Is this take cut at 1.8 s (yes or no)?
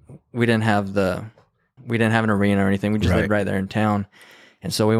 yes